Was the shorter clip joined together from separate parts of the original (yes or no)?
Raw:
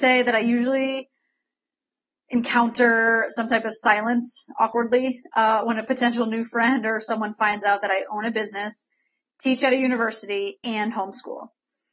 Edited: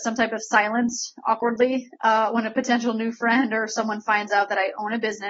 no